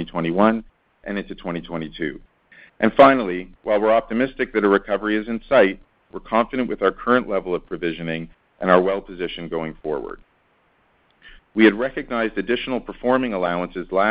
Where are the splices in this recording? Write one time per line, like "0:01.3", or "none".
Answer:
0:06.1
0:11.4